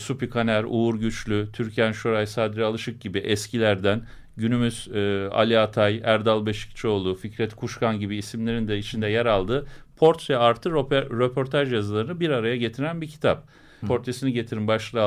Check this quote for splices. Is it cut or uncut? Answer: cut